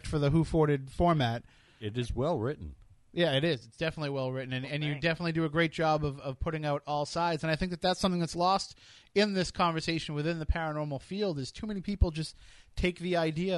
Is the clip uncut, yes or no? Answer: yes